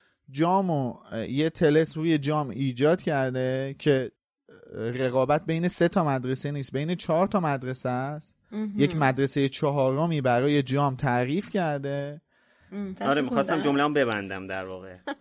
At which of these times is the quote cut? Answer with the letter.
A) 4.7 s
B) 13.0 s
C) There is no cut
B